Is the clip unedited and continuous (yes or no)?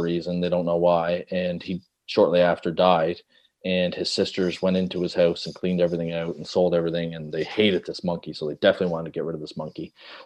yes